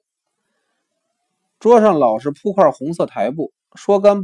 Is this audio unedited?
yes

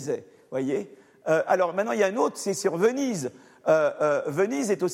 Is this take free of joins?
yes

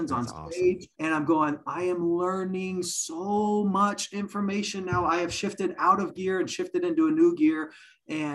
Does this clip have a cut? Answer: yes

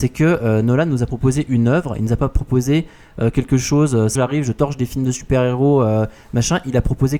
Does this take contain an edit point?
yes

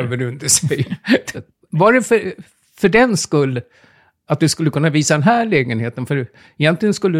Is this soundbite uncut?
no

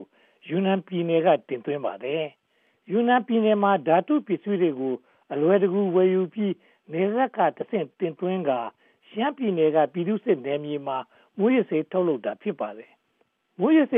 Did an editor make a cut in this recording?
no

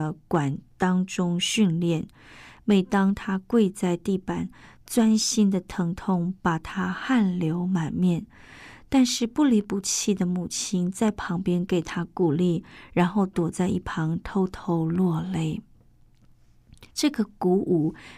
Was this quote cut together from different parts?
no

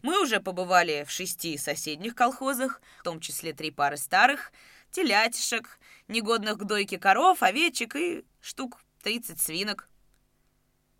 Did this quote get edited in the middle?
yes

